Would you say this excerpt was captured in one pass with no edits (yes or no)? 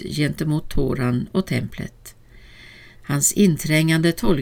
no